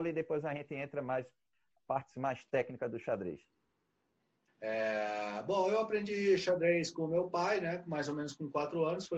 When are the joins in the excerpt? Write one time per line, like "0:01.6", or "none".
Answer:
0:04.5